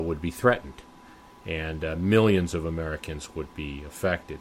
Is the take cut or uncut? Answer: uncut